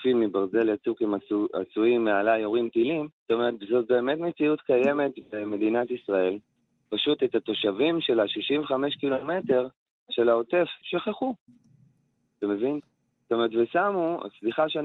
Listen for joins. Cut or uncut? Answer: cut